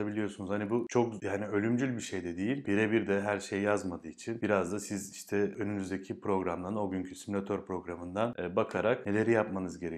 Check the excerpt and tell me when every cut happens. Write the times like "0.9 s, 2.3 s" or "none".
2.6 s